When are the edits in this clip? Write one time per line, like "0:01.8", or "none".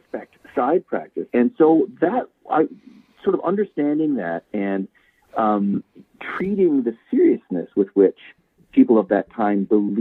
0:01.3

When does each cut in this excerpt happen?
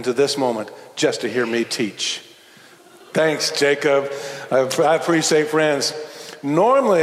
none

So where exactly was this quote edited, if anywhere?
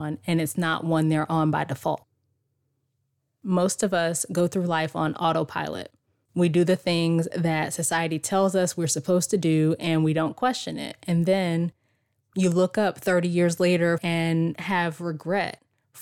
0:14.0

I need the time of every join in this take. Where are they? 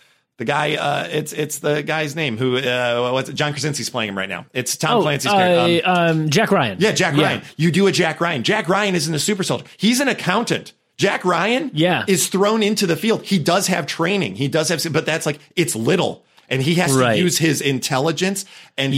none

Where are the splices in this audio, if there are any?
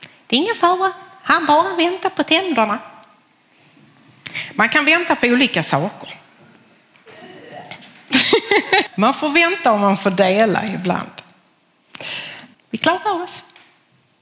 0:08.9
0:12.5

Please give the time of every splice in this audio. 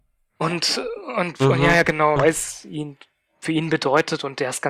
0:02.2

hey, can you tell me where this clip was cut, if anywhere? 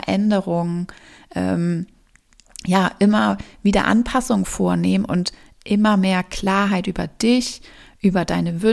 none

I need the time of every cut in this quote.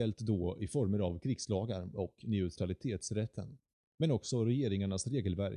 0:04.0

